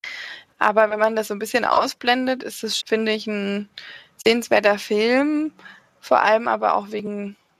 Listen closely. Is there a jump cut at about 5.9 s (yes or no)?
no